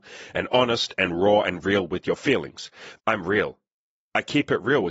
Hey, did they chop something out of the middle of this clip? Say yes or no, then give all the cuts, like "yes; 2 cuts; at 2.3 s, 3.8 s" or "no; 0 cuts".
yes; 1 cut; at 3.0 s